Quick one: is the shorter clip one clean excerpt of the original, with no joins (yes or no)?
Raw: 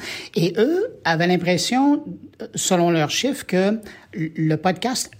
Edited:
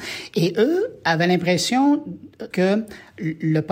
no